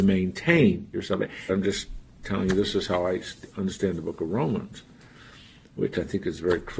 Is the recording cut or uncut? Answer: cut